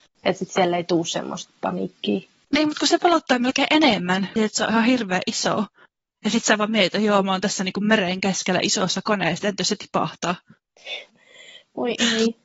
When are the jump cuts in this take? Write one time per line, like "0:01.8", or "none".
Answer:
0:04.4
0:11.1